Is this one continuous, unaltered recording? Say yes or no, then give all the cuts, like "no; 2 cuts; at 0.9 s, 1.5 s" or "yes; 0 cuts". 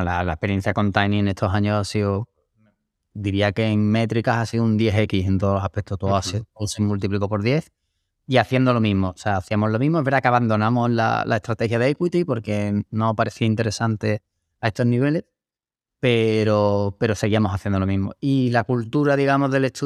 yes; 0 cuts